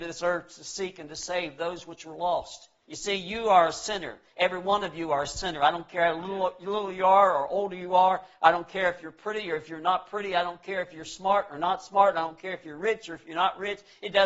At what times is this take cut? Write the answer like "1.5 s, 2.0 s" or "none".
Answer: 2.8 s